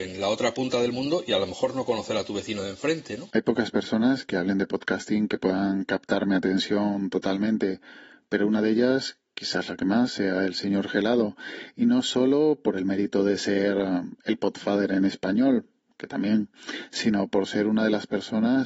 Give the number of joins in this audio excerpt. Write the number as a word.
zero